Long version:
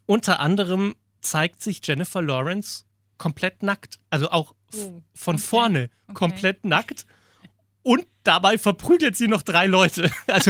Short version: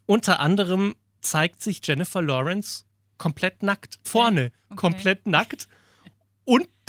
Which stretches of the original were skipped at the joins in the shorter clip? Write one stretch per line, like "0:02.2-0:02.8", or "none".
0:04.0-0:05.4